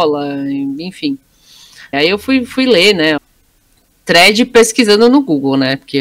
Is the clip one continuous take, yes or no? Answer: no